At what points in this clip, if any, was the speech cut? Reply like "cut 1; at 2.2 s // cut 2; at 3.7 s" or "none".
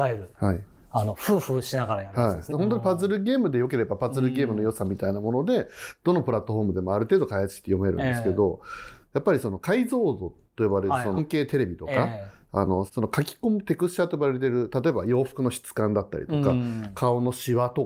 cut 1; at 2.5 s // cut 2; at 11.2 s // cut 3; at 12.9 s